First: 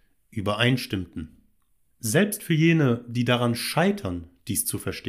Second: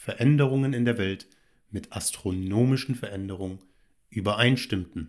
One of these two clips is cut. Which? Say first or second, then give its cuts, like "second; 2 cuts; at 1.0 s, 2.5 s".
first; 1 cut; at 1.9 s